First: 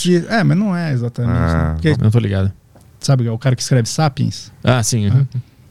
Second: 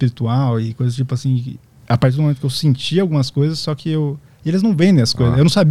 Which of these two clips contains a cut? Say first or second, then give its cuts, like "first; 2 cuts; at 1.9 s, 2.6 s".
first; 1 cut; at 1.9 s